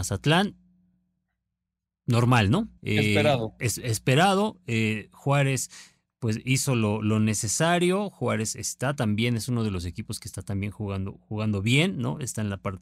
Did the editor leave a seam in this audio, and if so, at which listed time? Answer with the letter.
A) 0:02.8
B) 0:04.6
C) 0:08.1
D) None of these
A